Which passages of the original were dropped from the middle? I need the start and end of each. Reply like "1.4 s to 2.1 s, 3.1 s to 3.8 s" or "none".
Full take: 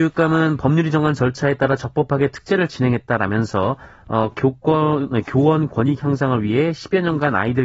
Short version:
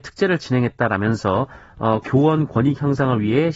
4.3 s to 5.2 s

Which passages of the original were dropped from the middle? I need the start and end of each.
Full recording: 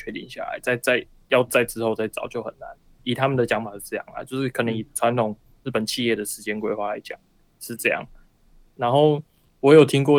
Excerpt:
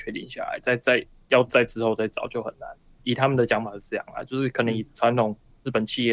none

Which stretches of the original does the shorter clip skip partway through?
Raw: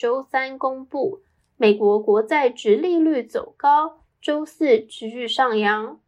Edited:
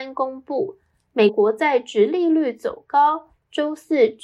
1.7 s to 2.0 s

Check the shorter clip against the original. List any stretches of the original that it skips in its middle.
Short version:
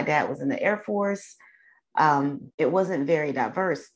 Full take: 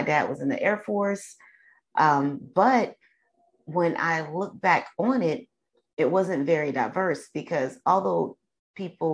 2.5 s to 5.9 s

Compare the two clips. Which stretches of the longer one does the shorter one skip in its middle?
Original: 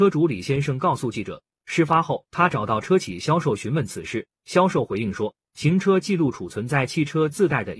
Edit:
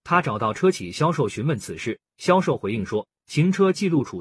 none

